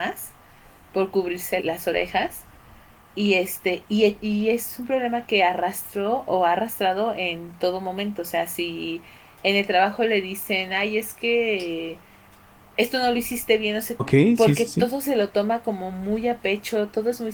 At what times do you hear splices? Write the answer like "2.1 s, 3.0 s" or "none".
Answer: 1.6 s, 14.0 s

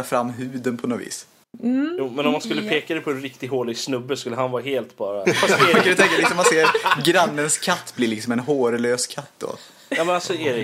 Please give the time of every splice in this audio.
1.4 s, 5.2 s

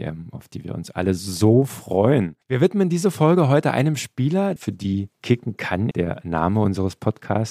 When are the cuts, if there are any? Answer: 2.4 s, 4.6 s, 5.9 s

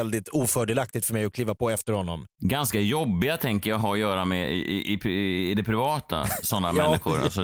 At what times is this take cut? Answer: 2.4 s, 6.4 s

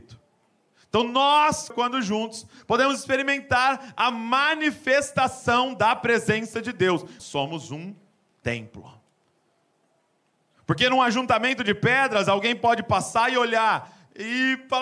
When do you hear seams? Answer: 1.7 s, 7.2 s

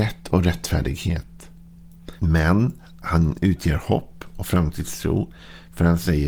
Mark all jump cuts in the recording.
2.2 s

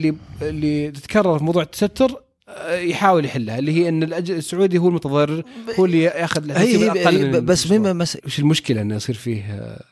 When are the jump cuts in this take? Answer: 8.2 s

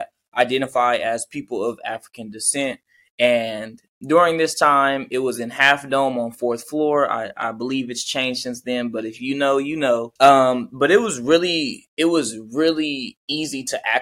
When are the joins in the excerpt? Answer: 10.2 s

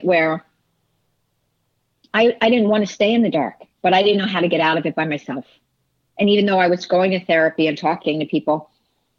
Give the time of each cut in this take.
none

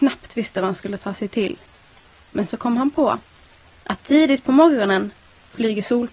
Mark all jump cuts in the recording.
none

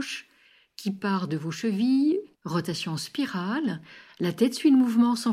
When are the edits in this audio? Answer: 2.3 s

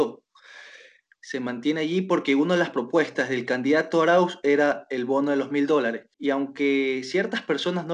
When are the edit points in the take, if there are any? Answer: 1.1 s, 6.1 s

